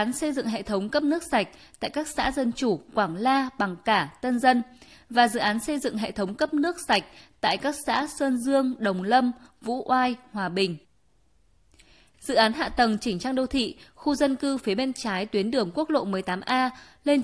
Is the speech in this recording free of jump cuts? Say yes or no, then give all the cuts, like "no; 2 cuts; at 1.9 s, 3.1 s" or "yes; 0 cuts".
no; 1 cut; at 12.1 s